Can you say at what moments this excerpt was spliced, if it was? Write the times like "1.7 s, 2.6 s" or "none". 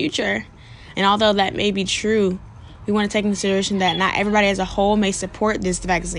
0.9 s